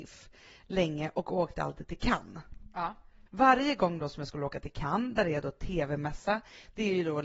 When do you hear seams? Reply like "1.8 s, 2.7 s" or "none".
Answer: 3.3 s